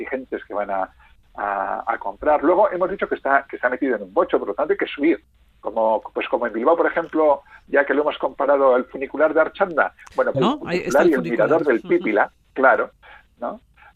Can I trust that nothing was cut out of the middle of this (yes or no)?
no